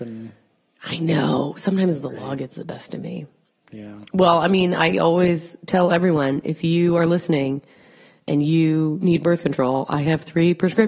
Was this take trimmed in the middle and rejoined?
no; 0 cuts

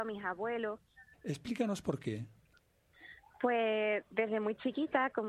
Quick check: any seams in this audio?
yes; 1 cut; at 1.1 s

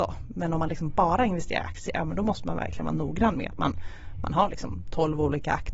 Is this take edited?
no; 0 cuts

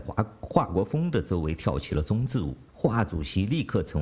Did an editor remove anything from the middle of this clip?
yes; 1 cut; at 2.7 s

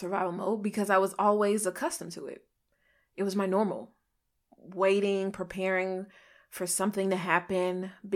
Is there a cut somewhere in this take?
no; 0 cuts

